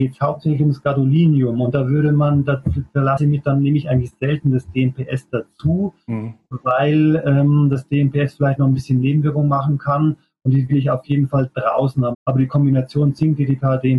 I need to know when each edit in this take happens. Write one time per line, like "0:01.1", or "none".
0:12.1